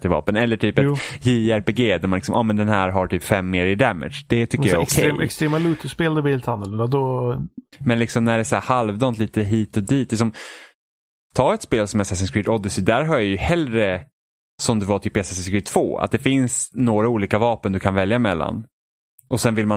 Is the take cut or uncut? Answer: cut